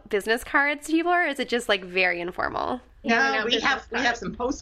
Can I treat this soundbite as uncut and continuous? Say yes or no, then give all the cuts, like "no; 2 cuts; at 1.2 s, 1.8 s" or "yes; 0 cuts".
no; 1 cut; at 3.0 s